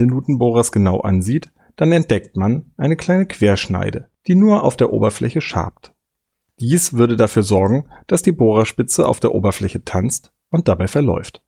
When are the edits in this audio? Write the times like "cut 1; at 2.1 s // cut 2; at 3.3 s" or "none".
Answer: none

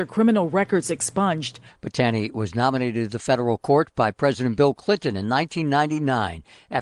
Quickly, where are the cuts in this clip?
cut 1; at 1.7 s

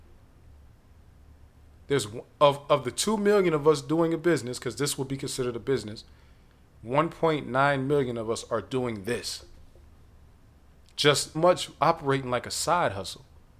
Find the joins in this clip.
cut 1; at 11.3 s

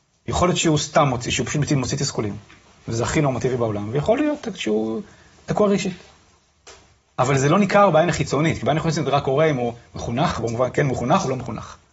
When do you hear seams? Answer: cut 1; at 4.4 s

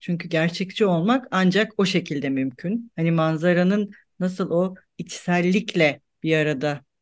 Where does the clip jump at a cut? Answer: cut 1; at 2.9 s

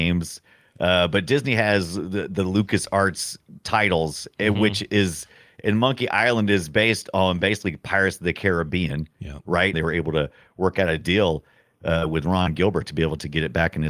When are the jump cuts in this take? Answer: cut 1; at 9.7 s

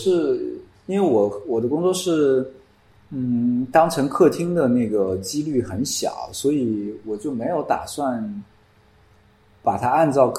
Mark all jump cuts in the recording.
none

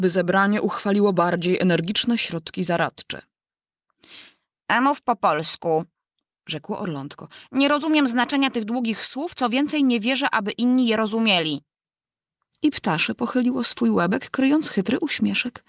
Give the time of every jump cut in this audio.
none

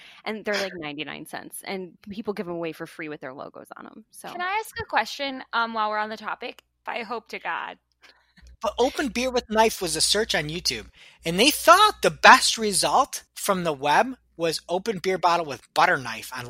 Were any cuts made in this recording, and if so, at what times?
cut 1; at 6.9 s // cut 2; at 13.3 s

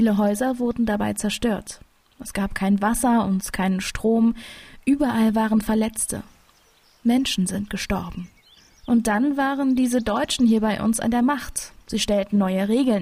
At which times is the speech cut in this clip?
cut 1; at 11.8 s

